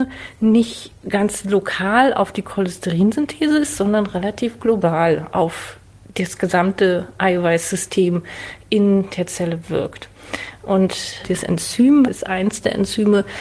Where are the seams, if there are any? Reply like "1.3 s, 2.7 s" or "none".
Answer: 12.1 s